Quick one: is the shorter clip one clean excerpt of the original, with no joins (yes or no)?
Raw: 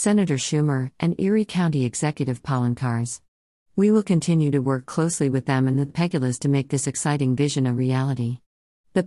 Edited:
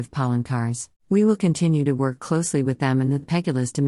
no